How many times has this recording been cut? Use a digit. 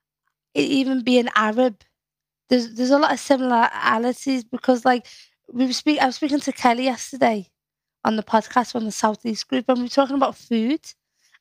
0